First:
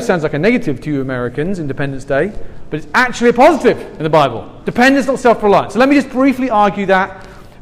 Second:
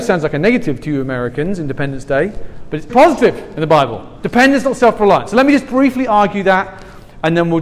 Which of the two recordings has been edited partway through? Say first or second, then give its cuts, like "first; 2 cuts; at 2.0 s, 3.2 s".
second; 1 cut; at 2.9 s